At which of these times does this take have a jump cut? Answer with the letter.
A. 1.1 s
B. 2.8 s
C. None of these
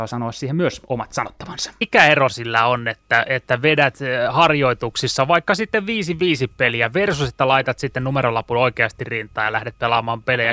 C